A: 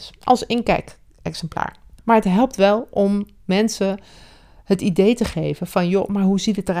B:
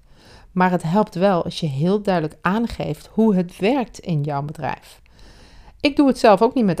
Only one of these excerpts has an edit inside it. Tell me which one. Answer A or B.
A